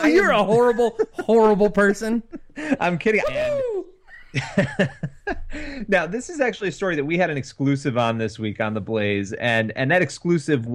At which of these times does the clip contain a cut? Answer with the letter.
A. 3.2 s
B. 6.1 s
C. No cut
A